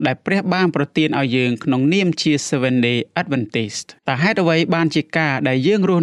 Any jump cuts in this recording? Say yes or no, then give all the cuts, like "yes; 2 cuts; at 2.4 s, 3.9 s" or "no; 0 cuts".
yes; 1 cut; at 4.0 s